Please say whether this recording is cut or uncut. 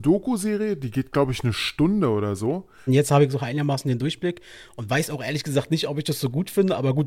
cut